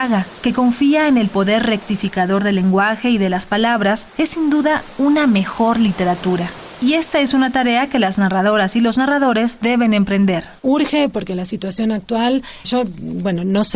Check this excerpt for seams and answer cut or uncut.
cut